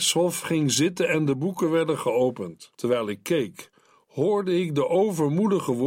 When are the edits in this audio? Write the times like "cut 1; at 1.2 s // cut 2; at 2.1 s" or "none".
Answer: cut 1; at 2.7 s